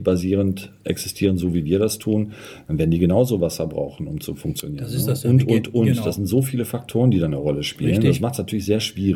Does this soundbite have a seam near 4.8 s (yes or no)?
no